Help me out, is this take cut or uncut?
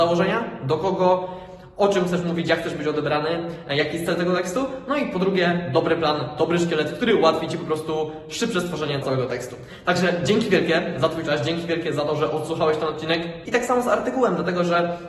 cut